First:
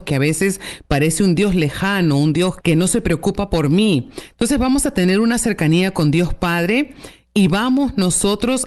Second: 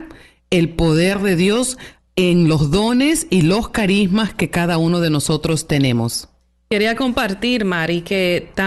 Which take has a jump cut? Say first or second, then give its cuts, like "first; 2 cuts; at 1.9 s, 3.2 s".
first; 1 cut; at 2.6 s